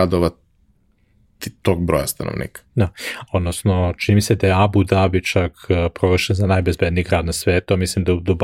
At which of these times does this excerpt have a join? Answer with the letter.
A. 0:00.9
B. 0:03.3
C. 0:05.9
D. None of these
B